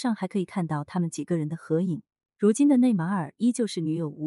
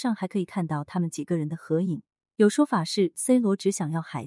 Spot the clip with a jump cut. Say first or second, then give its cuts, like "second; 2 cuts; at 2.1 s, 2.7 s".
second; 1 cut; at 2.2 s